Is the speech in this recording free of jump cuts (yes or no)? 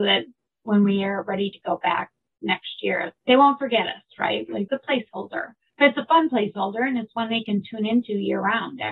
no